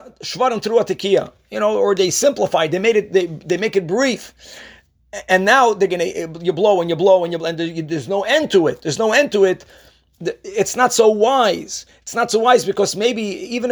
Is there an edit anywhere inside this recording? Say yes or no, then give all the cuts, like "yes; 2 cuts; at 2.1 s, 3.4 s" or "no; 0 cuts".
no; 0 cuts